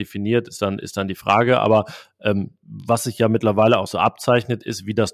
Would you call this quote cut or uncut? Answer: uncut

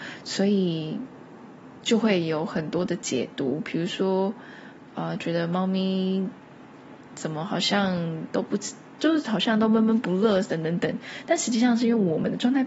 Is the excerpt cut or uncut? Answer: uncut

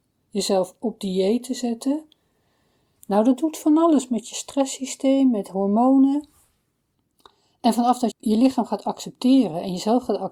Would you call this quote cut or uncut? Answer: cut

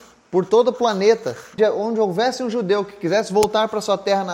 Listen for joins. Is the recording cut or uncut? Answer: cut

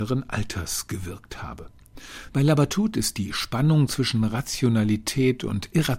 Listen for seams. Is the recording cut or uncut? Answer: cut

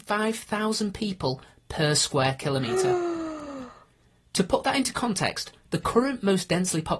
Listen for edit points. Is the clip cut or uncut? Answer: uncut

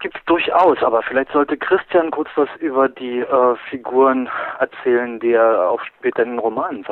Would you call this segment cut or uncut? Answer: uncut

